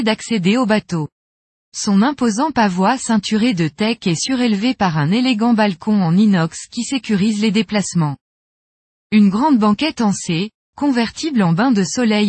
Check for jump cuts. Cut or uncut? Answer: uncut